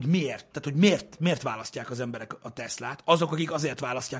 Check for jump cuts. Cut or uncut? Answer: cut